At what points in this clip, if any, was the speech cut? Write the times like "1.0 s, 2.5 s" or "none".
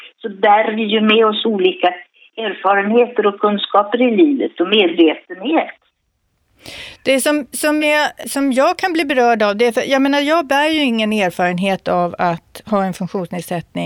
none